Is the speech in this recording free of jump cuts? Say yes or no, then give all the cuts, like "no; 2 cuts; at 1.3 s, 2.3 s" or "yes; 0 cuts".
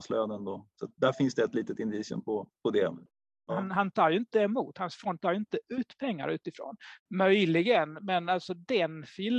no; 2 cuts; at 3.5 s, 7.0 s